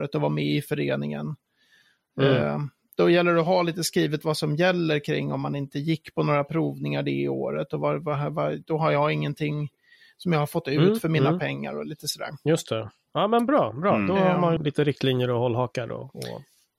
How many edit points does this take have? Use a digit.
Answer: 1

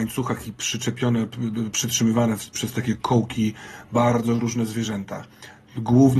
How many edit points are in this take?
0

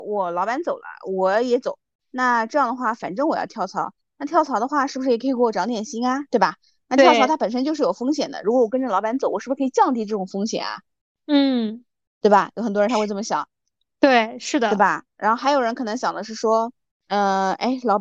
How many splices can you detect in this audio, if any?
0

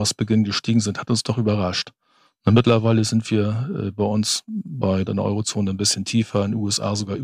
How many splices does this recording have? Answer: 1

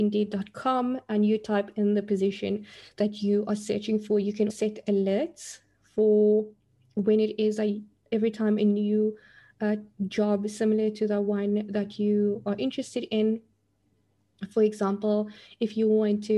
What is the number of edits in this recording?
1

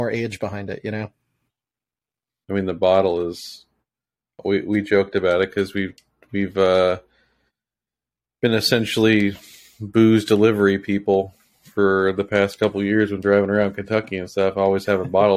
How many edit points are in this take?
1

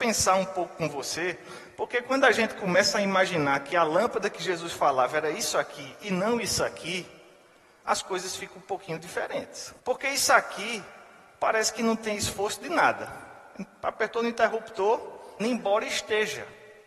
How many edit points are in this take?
2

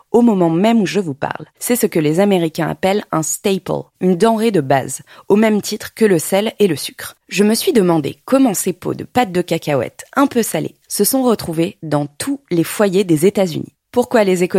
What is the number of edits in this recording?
2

